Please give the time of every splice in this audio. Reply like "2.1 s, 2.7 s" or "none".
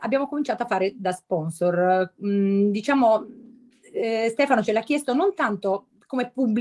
none